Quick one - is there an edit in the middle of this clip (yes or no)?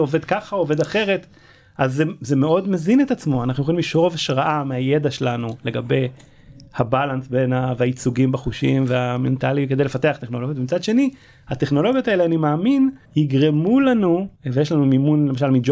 yes